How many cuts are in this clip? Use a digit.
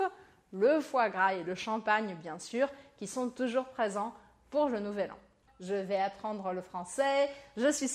1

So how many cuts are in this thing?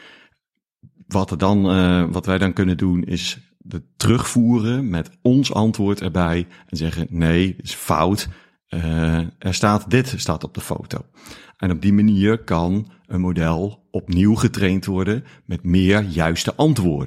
0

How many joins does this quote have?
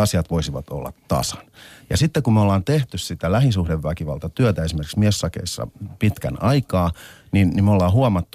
0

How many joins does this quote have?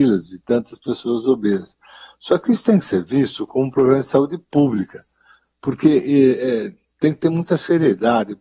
0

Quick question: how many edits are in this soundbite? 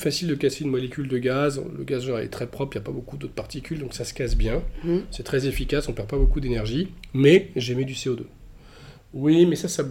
1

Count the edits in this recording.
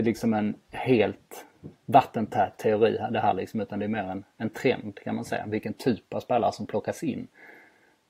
0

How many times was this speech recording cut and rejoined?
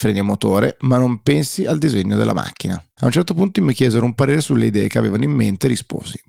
1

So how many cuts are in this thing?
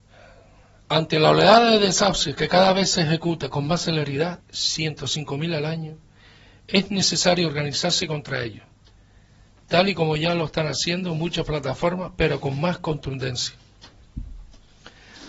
1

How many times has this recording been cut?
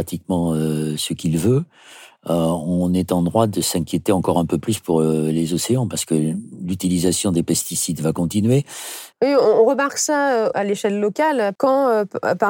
3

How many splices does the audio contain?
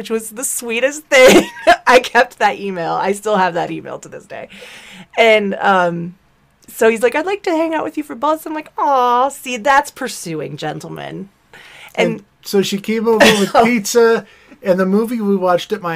0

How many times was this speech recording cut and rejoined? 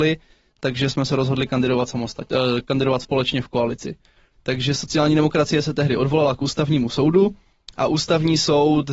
1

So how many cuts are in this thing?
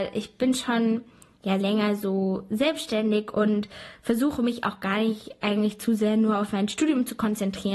1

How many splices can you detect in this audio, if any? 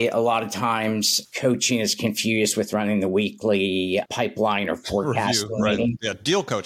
2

